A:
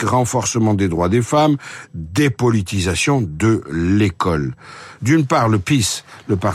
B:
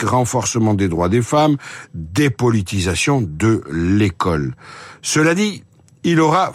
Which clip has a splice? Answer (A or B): A